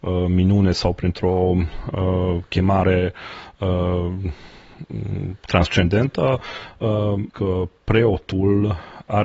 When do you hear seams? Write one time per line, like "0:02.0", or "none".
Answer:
0:07.3